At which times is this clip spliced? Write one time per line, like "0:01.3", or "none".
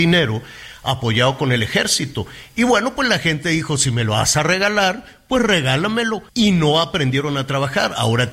0:06.3